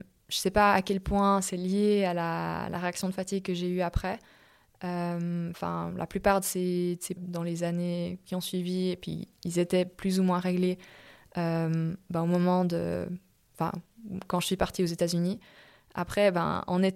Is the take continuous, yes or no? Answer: no